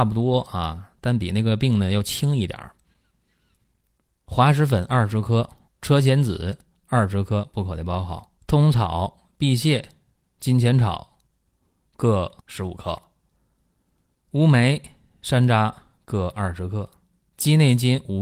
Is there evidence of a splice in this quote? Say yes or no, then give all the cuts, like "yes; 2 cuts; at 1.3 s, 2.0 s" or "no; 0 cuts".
yes; 3 cuts; at 5.7 s, 8.4 s, 12.4 s